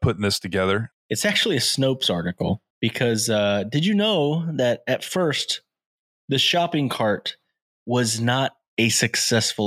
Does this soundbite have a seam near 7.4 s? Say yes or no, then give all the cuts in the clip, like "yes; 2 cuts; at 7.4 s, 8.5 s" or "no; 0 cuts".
no; 2 cuts; at 0.9 s, 2.7 s